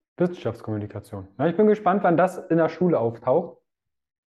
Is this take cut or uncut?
uncut